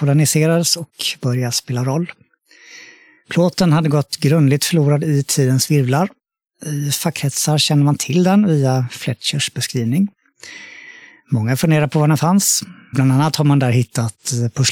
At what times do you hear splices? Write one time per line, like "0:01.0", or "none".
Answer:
0:12.9